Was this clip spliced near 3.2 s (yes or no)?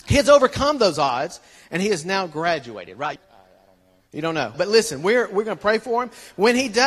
yes